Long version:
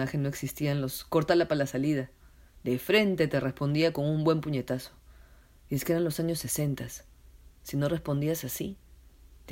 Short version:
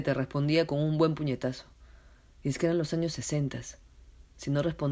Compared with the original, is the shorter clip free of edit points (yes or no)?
yes